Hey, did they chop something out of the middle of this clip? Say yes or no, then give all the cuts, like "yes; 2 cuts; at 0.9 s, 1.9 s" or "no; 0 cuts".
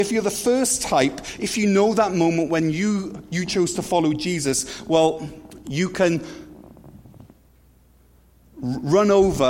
no; 0 cuts